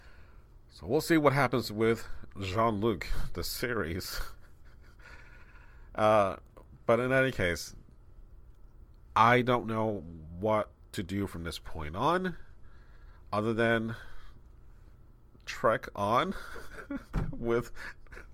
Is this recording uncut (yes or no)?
yes